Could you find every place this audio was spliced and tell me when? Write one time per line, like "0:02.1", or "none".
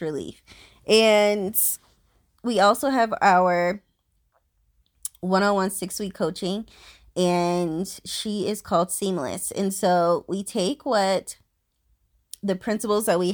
none